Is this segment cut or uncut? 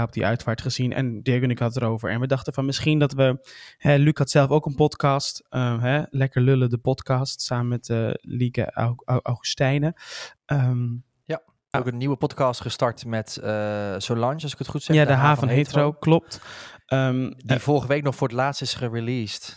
cut